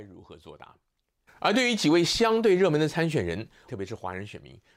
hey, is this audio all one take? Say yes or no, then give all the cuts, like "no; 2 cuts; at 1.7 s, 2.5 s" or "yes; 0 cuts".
no; 2 cuts; at 1.3 s, 3.7 s